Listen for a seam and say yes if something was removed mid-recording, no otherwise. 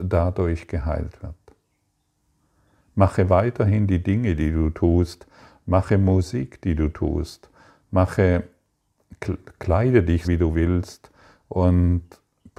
yes